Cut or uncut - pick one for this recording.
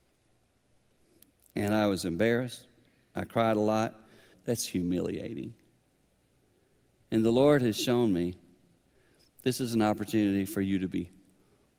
cut